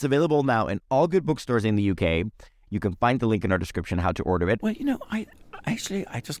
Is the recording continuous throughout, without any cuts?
no; 1 cut; at 4.6 s

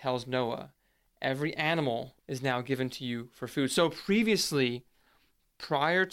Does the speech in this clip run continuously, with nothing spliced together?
no; 1 cut; at 2.2 s

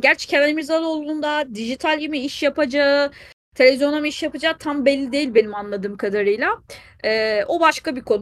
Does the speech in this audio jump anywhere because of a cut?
no; 0 cuts

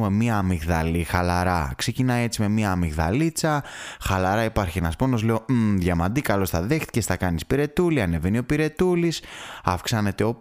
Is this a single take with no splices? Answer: yes; 0 cuts

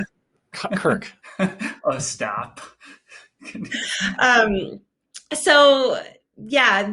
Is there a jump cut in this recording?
yes; 1 cut; at 1.2 s

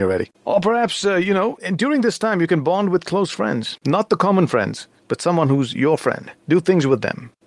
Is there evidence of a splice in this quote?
no; 0 cuts

